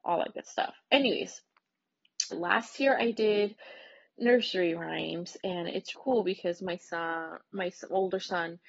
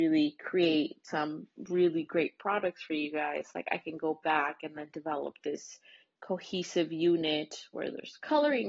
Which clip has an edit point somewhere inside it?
first; 2 cuts; at 2.3 s, 5.9 s

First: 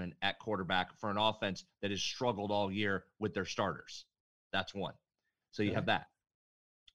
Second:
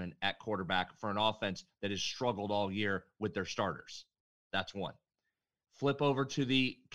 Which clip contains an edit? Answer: first; 1 cut; at 5.4 s

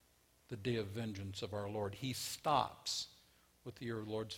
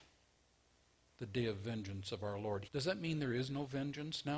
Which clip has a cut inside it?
second; 1 cut; at 2.7 s

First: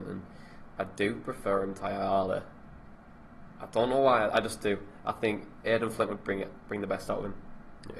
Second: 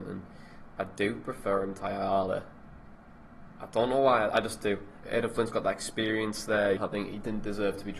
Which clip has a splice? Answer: second; 2 cuts; at 5.0 s, 6.8 s

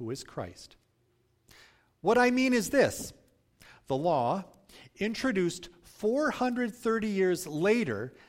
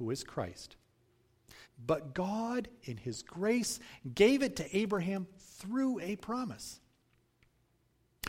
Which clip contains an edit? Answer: second; 1 cut; at 1.6 s

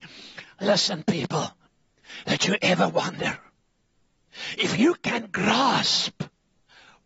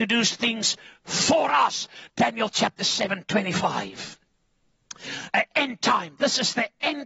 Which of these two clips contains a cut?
second; 1 cut; at 2.1 s

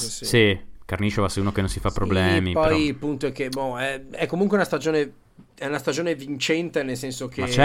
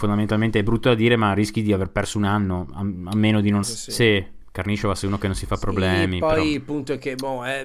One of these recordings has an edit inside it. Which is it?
second; 1 cut; at 3.6 s

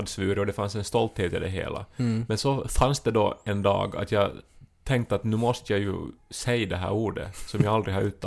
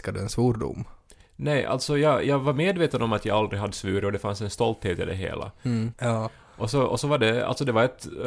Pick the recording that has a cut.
second; 1 cut; at 5.9 s

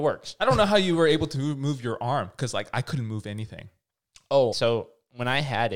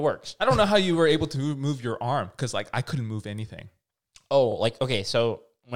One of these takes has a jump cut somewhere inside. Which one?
first; 1 cut; at 4.5 s

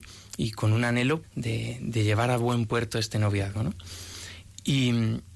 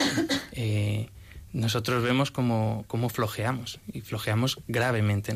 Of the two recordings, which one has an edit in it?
first; 1 cut; at 1.2 s

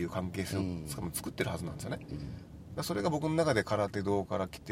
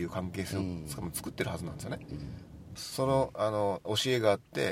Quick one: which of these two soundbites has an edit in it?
second; 1 cut; at 2.8 s

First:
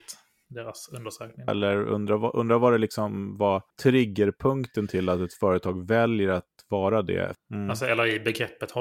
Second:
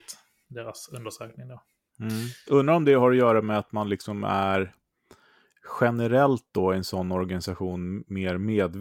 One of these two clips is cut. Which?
first; 3 cuts; at 1.5 s, 3.7 s, 7.3 s

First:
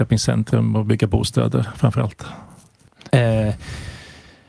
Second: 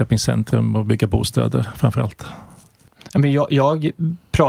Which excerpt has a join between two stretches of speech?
first; 1 cut; at 3.1 s

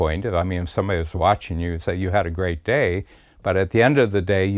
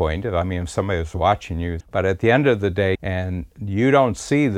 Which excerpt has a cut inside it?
second; 2 cuts; at 1.8 s, 3.0 s

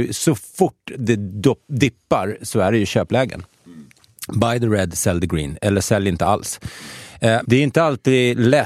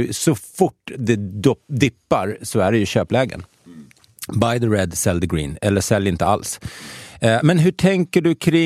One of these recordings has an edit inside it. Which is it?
first; 1 cut; at 7.4 s

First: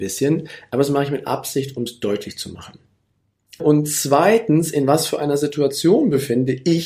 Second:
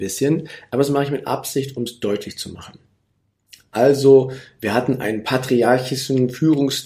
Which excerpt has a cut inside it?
first; 1 cut; at 3.6 s

